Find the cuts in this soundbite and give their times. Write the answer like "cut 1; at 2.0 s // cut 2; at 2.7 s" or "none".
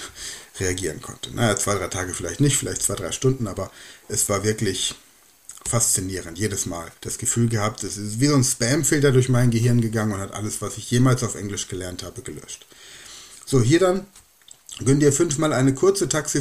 cut 1; at 7.0 s